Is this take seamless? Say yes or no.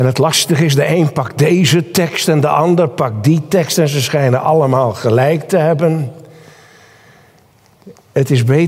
yes